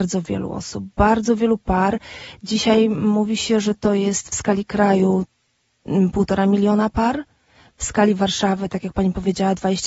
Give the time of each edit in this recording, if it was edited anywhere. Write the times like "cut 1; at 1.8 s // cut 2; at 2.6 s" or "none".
none